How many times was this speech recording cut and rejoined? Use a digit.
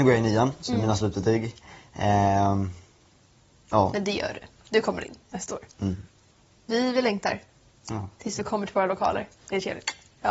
0